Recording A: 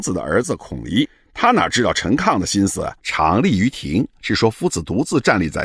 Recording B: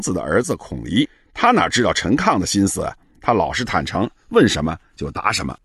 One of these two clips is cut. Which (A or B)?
A